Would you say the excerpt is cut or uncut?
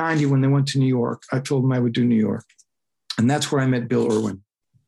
uncut